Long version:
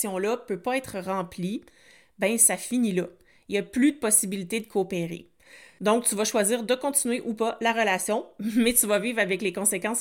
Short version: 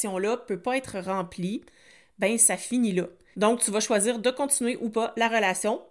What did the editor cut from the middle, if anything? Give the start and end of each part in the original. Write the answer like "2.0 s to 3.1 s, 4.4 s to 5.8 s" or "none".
3.3 s to 5.8 s